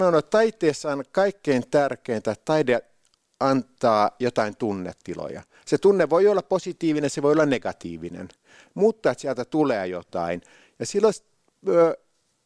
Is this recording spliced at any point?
no; 0 cuts

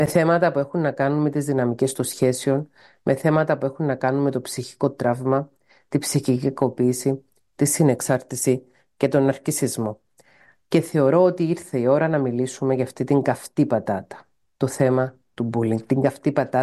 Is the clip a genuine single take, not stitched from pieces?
yes; 0 cuts

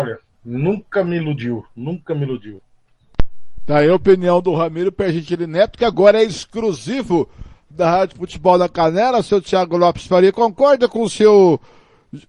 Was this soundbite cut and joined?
no; 0 cuts

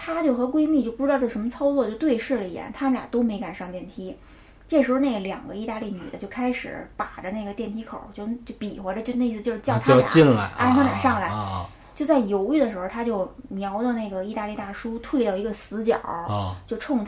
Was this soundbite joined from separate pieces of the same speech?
no; 0 cuts

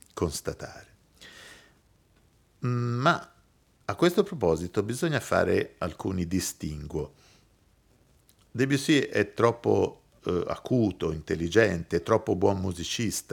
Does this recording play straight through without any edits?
yes; 0 cuts

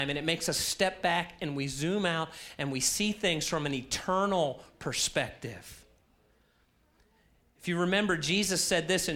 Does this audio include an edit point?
no; 0 cuts

